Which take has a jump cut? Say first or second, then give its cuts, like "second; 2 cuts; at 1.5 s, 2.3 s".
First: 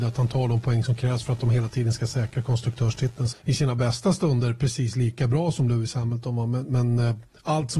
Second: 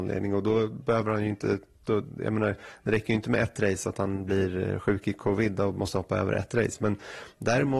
first; 1 cut; at 3.3 s